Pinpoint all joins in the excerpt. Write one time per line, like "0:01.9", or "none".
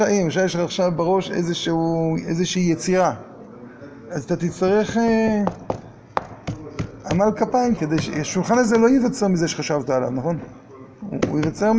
0:07.8